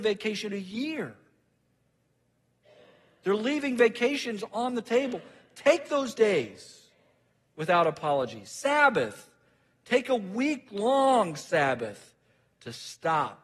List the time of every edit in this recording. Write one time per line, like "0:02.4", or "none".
none